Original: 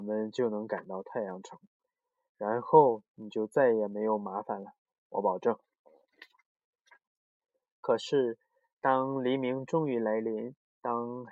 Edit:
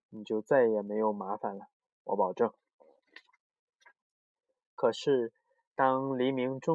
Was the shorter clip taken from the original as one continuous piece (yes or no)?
yes